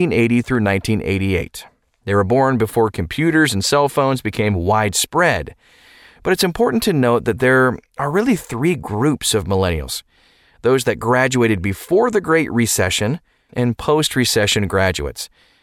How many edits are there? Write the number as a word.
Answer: one